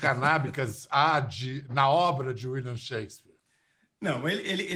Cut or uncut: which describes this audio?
uncut